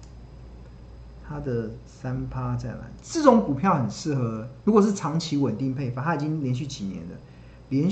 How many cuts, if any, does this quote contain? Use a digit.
1